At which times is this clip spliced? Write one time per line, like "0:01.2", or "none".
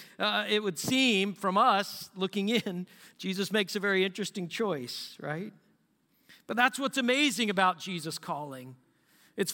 none